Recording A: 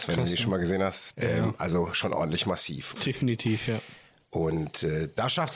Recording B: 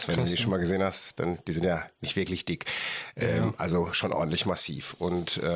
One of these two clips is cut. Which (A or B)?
A